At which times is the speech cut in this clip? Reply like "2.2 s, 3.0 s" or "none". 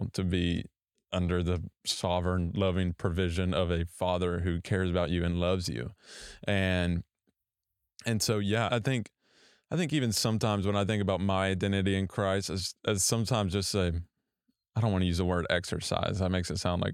8.7 s